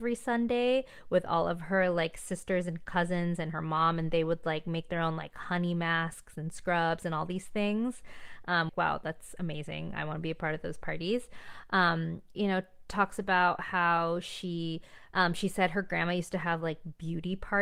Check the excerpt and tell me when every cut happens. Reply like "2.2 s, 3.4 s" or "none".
8.7 s, 12.3 s, 15.1 s